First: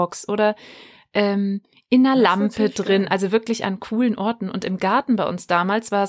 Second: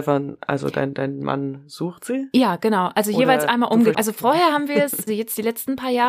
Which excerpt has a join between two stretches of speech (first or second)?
second